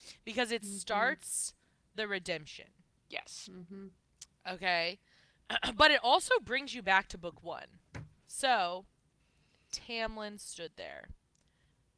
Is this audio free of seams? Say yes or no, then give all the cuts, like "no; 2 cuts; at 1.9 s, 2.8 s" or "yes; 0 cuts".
no; 1 cut; at 8.2 s